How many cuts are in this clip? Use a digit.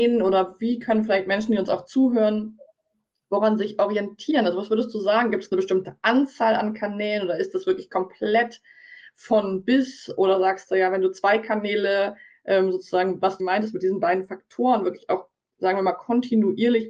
1